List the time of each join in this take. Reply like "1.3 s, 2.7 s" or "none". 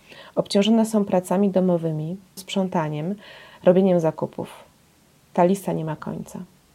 2.4 s